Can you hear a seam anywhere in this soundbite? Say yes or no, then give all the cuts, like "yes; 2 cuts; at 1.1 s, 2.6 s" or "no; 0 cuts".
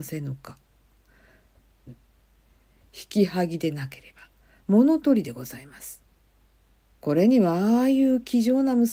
yes; 2 cuts; at 1.9 s, 7.0 s